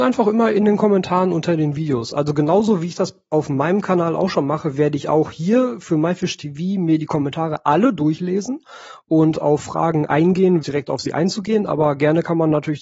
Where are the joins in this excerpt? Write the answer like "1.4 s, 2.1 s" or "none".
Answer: 10.6 s